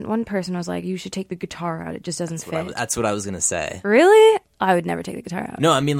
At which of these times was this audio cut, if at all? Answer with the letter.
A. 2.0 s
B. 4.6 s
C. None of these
C